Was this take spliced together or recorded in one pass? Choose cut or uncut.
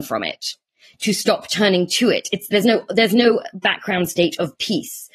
uncut